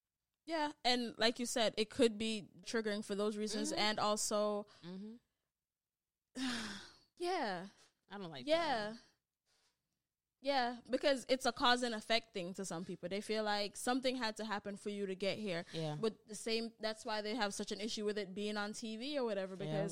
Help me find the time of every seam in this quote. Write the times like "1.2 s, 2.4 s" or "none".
2.6 s, 7.2 s